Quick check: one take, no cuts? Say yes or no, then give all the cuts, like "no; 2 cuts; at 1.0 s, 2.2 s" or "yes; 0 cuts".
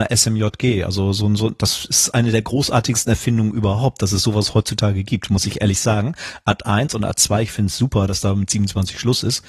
yes; 0 cuts